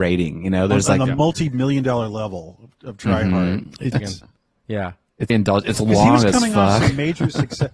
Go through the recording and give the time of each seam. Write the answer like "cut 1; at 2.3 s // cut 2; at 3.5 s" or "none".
cut 1; at 3.9 s // cut 2; at 5.3 s